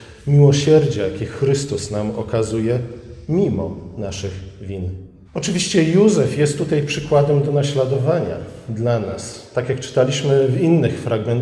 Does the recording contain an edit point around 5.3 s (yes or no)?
yes